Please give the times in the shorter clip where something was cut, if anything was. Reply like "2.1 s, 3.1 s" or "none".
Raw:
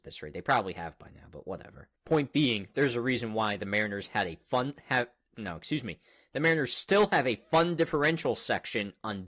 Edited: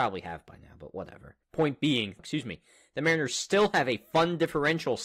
2.2 s